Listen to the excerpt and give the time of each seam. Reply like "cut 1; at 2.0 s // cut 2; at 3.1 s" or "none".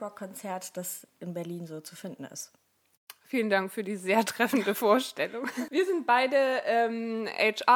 cut 1; at 5.7 s